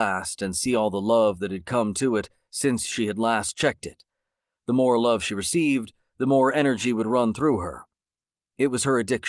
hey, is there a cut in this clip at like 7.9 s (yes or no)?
no